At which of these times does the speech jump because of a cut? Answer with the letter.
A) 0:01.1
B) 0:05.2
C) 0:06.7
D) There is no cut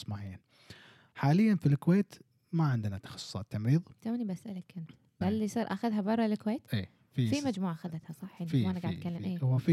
B